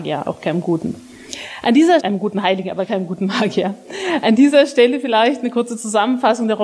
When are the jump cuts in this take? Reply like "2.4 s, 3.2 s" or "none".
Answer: 2.0 s

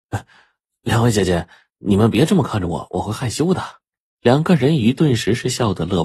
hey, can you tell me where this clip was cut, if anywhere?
4.1 s

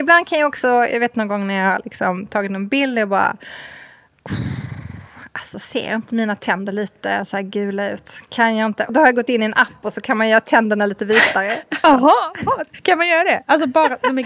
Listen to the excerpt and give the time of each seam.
8.9 s, 11.8 s

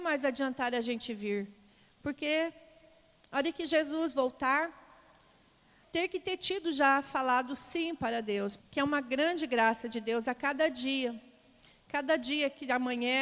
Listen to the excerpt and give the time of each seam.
5.8 s, 8.6 s

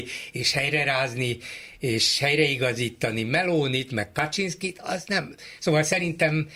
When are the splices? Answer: 5.6 s

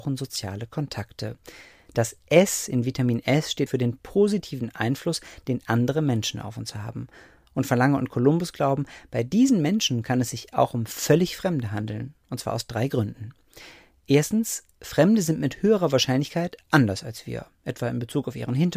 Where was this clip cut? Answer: 3.7 s

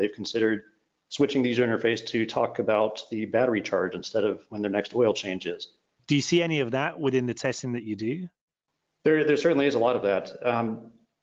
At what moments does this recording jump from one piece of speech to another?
6.0 s

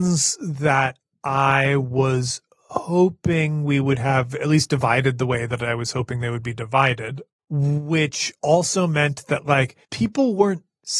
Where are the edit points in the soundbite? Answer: 9.8 s

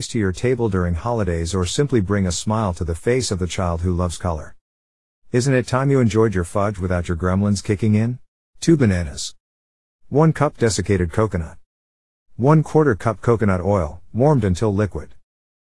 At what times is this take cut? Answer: 8.6 s

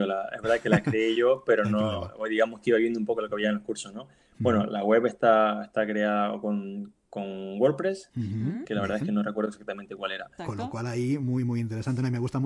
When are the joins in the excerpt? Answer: 8.6 s, 10.4 s

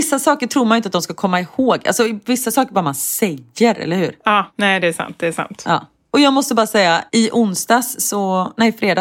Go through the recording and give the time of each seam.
none

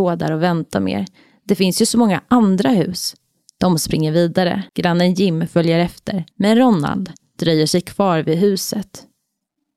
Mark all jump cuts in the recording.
4.7 s, 6.3 s

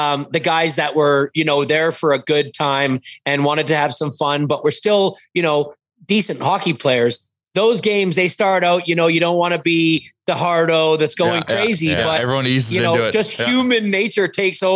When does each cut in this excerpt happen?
none

